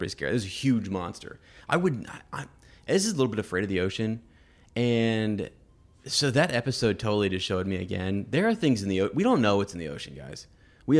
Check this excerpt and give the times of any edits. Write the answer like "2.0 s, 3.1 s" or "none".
none